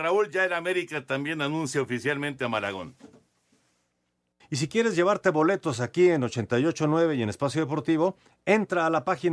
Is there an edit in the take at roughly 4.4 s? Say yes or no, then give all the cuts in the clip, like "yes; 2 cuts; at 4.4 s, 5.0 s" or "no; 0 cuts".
yes; 1 cut; at 4.4 s